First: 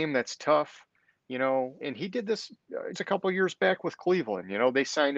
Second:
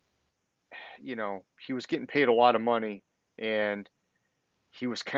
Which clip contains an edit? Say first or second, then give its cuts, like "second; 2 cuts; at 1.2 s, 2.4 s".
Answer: first; 2 cuts; at 1.8 s, 2.9 s